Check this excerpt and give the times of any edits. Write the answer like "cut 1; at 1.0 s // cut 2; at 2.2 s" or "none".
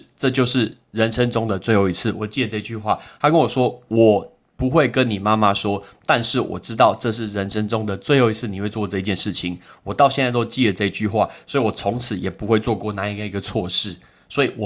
none